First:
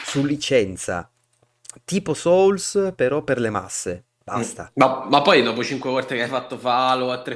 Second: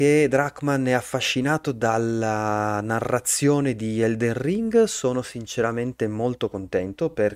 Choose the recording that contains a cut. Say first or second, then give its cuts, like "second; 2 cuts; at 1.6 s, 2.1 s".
first; 1 cut; at 4.0 s